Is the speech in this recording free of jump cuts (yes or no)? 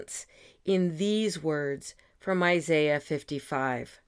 yes